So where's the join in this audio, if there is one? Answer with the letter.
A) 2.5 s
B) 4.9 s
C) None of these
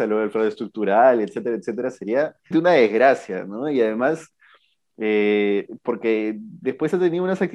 A